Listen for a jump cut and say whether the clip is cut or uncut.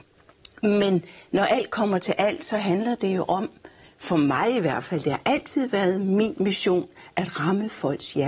uncut